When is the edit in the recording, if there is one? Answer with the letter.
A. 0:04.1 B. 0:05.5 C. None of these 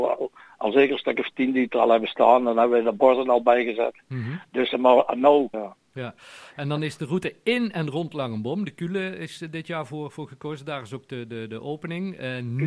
B